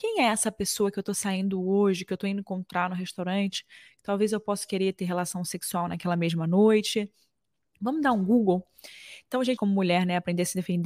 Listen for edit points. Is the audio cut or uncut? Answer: cut